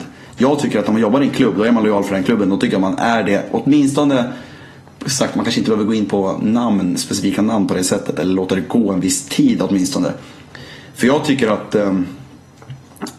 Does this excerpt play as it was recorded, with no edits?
yes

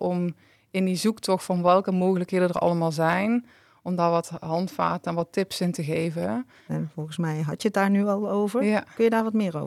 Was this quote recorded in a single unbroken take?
no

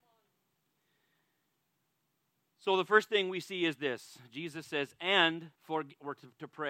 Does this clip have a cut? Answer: yes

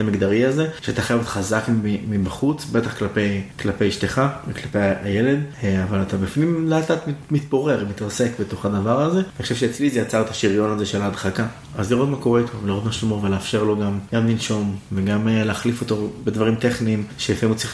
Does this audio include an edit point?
no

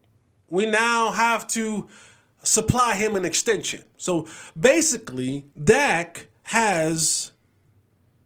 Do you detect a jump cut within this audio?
yes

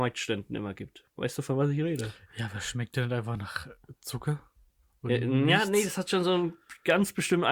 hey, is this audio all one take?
yes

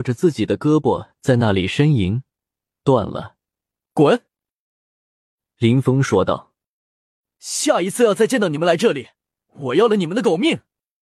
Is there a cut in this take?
yes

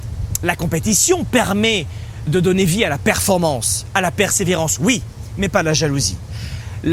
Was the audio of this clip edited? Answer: yes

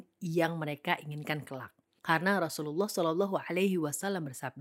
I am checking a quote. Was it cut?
no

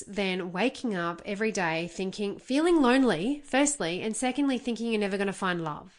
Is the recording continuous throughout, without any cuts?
yes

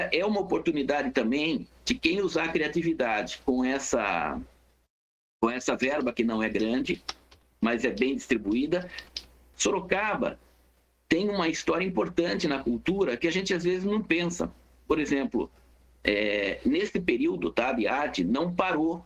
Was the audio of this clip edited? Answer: yes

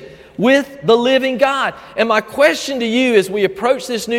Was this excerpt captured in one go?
yes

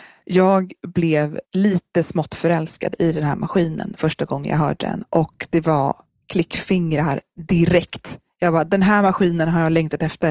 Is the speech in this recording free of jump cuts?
no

